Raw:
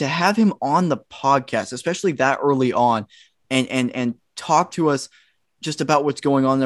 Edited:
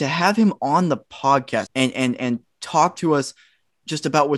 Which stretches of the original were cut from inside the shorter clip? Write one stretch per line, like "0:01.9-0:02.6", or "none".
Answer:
0:01.7-0:03.4